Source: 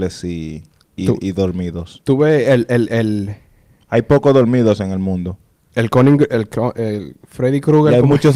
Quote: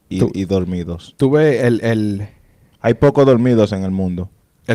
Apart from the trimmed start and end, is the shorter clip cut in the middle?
yes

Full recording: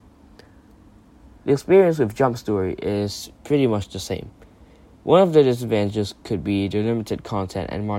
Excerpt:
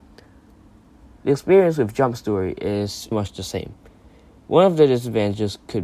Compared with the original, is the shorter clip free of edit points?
no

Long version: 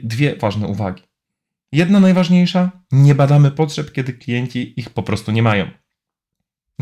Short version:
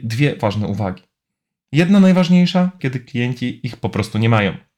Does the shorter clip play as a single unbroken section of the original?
no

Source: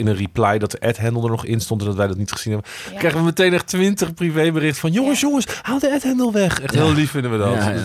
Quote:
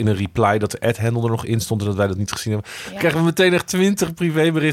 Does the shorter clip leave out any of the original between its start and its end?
no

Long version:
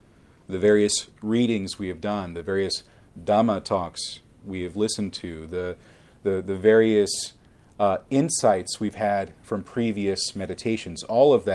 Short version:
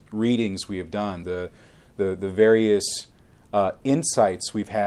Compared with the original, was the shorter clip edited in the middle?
yes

